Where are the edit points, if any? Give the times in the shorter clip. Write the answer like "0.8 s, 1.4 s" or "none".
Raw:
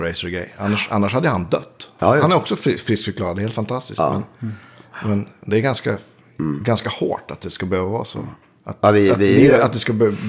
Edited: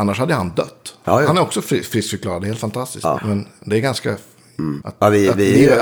3.2 s, 4.8 s